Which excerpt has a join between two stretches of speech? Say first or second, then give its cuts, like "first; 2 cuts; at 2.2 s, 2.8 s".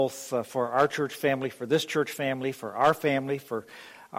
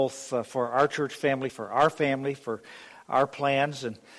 second; 1 cut; at 1.5 s